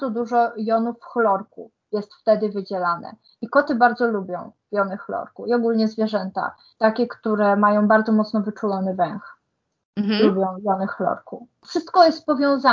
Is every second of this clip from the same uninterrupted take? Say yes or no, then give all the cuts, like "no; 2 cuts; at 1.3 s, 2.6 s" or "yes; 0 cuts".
yes; 0 cuts